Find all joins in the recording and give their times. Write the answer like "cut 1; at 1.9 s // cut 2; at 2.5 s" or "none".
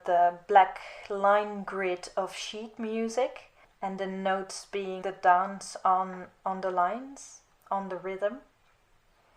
cut 1; at 5.0 s